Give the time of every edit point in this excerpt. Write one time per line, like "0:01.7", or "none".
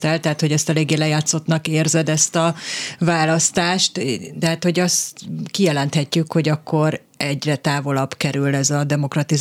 none